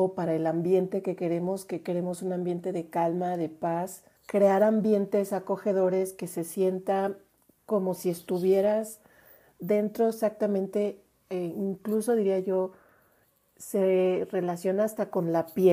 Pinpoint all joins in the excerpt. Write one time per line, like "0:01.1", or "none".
0:04.2